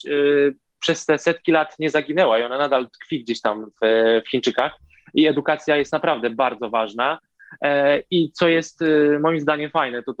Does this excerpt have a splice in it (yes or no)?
no